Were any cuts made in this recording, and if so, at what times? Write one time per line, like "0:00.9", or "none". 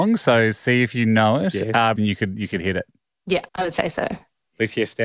0:02.0
0:03.5